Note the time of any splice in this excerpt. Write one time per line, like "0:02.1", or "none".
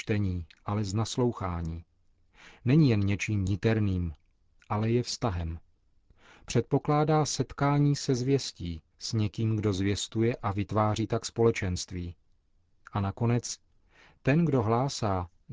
0:08.9